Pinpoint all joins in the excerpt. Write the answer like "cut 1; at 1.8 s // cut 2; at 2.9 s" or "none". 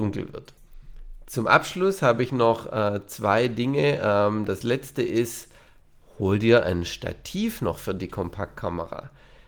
none